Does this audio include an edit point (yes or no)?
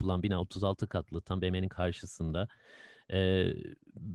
no